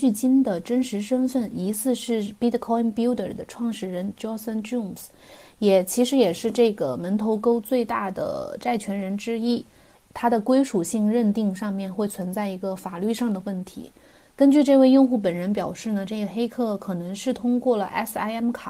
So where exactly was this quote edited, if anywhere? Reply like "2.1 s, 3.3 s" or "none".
9.9 s